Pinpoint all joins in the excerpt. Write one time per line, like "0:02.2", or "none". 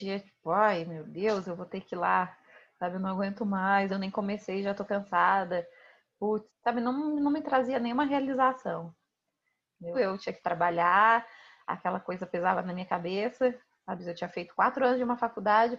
0:03.9
0:06.5
0:09.9